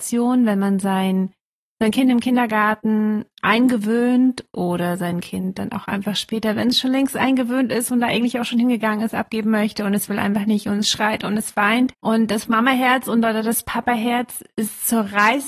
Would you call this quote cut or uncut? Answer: cut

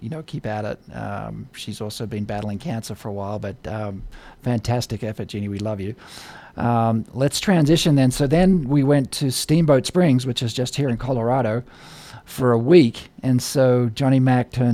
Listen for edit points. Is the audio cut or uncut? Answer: uncut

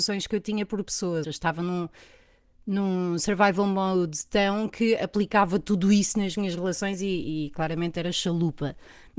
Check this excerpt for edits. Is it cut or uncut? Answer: cut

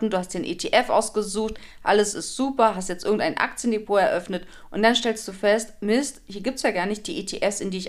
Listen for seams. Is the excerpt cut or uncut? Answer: uncut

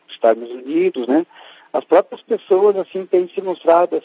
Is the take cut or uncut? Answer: uncut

